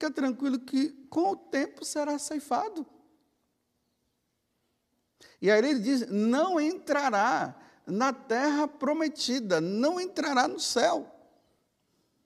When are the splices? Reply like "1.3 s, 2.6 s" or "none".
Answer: none